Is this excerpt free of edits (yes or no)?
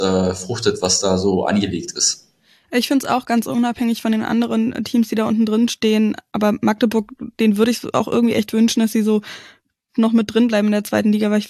yes